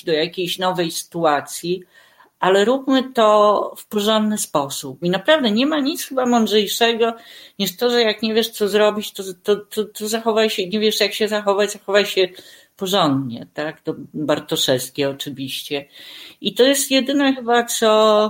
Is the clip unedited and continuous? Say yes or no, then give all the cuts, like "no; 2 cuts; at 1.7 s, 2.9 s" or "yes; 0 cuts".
no; 1 cut; at 5.0 s